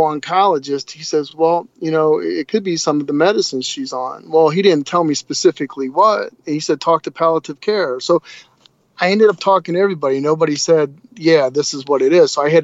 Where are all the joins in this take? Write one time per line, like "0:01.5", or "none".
none